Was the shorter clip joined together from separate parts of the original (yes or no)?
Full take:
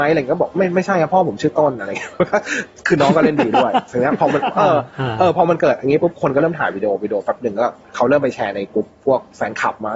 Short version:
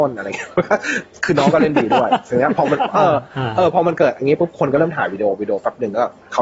no